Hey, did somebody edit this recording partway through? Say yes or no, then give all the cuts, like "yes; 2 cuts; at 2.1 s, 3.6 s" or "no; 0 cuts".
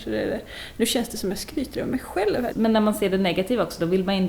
yes; 1 cut; at 2.5 s